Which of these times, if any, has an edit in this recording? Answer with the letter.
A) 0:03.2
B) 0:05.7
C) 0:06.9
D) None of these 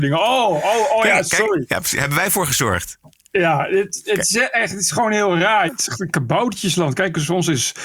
B